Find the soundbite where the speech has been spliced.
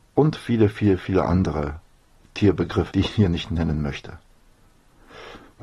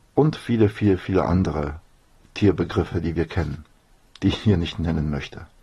first; 1 cut; at 2.9 s

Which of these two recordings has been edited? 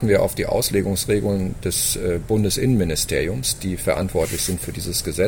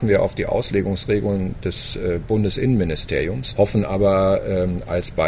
second; 1 cut; at 3.6 s

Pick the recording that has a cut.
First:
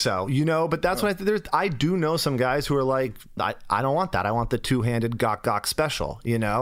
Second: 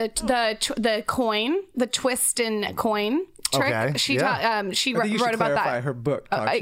first; 1 cut; at 3.4 s

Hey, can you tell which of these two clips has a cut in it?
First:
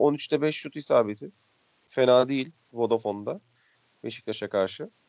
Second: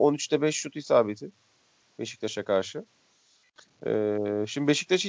second; 1 cut; at 1.8 s

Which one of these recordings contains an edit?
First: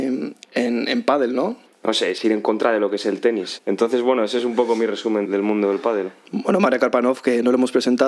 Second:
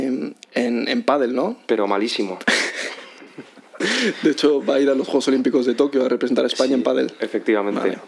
first; 3 cuts; at 1.7 s, 3.6 s, 5.2 s

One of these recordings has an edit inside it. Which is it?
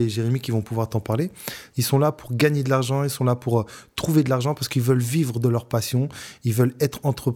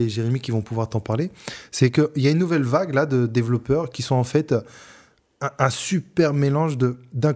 first; 1 cut; at 1.7 s

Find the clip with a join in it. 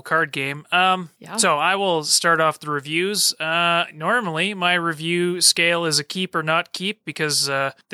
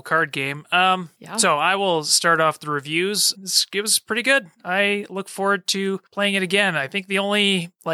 second; 1 cut; at 3.3 s

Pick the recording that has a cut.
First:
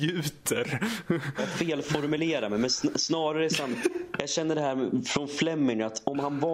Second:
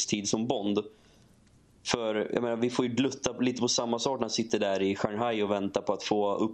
first; 1 cut; at 1.4 s

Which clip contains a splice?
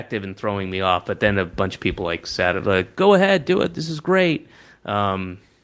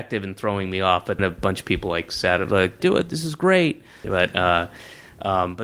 second; 3 cuts; at 1.2 s, 2.8 s, 4.0 s

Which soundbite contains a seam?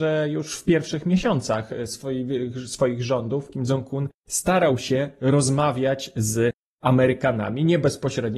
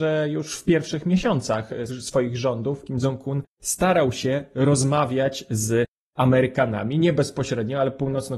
second; 1 cut; at 1.9 s

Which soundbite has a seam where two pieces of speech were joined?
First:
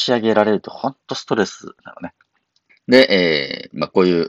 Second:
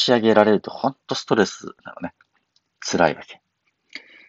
first; 1 cut; at 2.7 s

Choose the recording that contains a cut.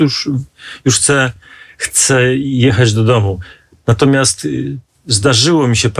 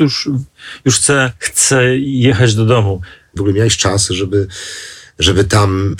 second; 2 cuts; at 1.4 s, 3.4 s

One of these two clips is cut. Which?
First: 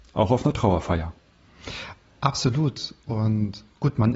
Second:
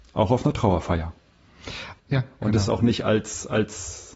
second; 1 cut; at 2.0 s

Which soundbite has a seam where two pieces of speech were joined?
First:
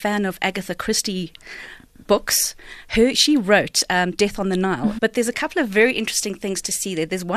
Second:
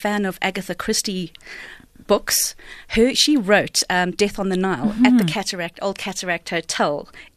first; 1 cut; at 5.0 s

